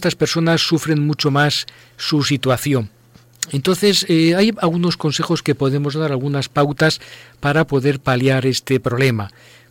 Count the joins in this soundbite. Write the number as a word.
zero